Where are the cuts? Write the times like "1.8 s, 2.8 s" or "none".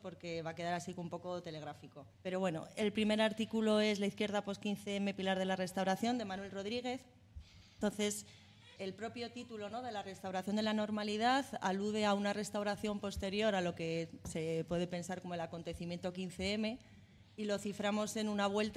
2.1 s, 8.8 s